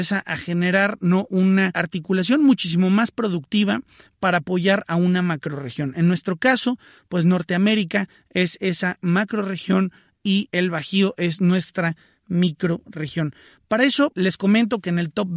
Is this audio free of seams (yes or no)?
yes